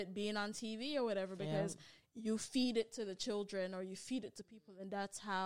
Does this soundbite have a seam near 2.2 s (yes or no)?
no